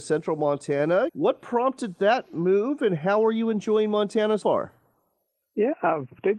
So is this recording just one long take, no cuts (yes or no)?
no